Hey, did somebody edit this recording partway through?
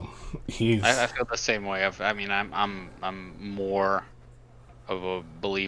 no; 0 cuts

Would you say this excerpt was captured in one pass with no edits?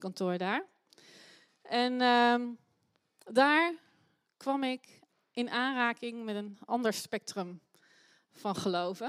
yes; 0 cuts

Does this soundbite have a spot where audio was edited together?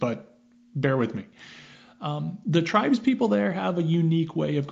no; 0 cuts

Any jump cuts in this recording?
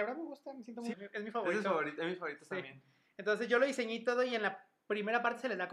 yes; 1 cut; at 0.9 s

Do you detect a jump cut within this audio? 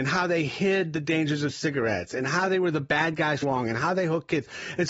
yes; 1 cut; at 3.4 s

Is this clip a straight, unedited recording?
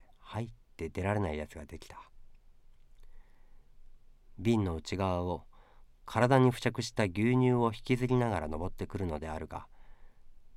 yes; 0 cuts

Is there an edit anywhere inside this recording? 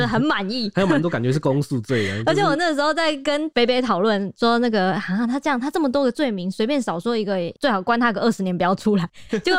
no; 0 cuts

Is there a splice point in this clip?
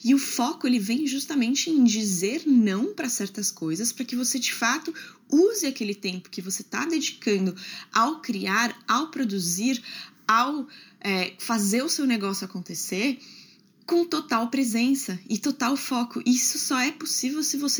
no; 0 cuts

